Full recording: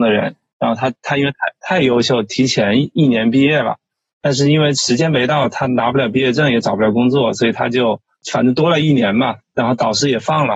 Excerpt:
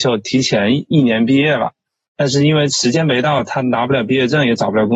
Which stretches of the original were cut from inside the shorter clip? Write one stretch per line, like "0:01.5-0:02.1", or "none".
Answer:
none